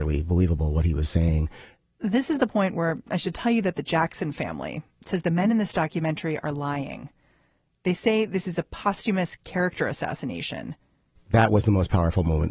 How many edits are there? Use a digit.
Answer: 1